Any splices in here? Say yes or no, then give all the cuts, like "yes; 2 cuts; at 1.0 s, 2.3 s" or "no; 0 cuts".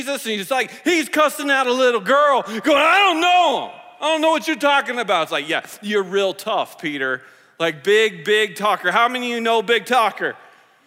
no; 0 cuts